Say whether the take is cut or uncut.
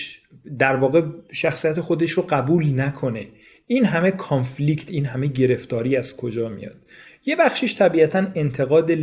uncut